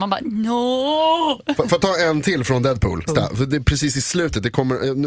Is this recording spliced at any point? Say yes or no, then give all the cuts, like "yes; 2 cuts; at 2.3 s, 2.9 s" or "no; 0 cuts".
yes; 1 cut; at 3.1 s